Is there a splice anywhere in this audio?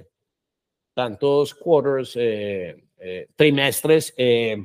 no; 0 cuts

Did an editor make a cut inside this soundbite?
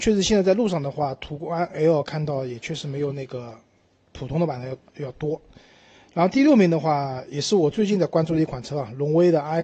no; 0 cuts

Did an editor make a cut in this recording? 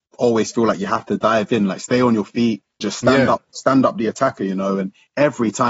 yes; 1 cut; at 2.8 s

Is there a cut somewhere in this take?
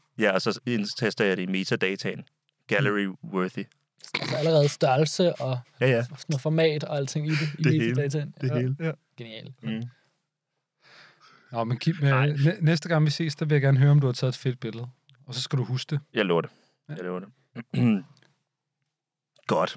yes; 1 cut; at 4.1 s

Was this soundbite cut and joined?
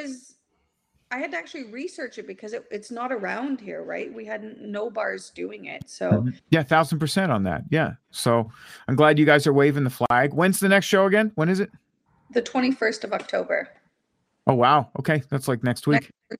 yes; 1 cut; at 6.4 s

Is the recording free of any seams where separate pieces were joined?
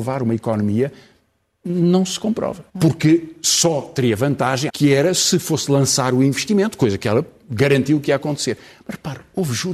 no; 2 cuts; at 2.7 s, 4.7 s

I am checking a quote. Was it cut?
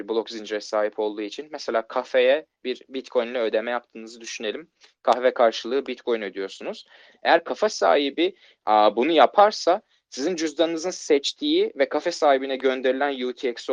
yes; 1 cut; at 7.1 s

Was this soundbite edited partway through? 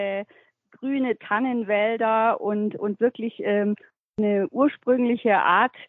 no; 0 cuts

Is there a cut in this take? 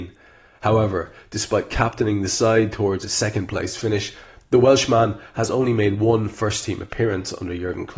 no; 0 cuts

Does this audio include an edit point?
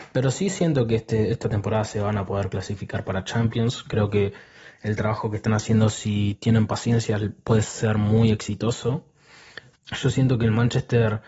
yes; 1 cut; at 9.7 s

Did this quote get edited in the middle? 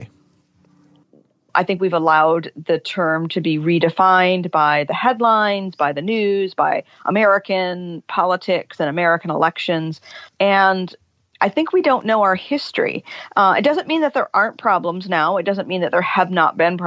no; 0 cuts

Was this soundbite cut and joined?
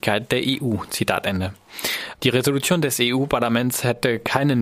yes; 1 cut; at 2.2 s

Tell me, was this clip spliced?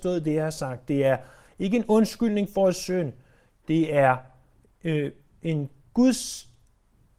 no; 0 cuts

